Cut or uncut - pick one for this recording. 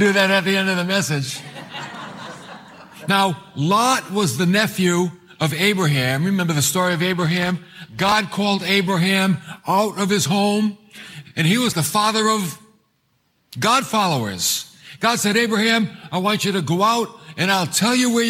cut